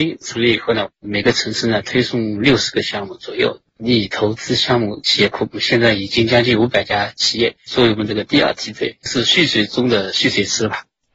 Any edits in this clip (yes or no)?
yes